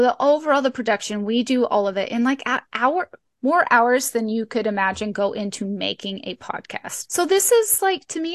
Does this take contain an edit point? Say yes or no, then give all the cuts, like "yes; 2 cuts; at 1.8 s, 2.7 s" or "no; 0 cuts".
no; 0 cuts